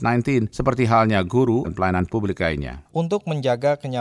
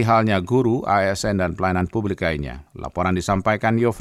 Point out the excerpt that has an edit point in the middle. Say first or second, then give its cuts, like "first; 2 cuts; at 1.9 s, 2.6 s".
first; 2 cuts; at 1.6 s, 2.9 s